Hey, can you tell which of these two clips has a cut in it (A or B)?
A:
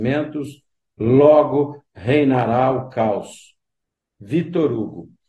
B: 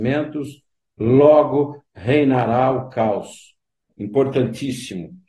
B